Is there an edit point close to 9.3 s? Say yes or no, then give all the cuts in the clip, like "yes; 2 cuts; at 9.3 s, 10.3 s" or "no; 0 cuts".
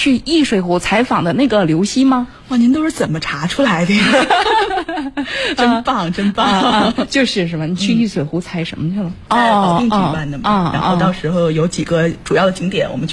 yes; 1 cut; at 9.3 s